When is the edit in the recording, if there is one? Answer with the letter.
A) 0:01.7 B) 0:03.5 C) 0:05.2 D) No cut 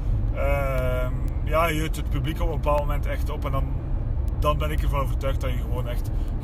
D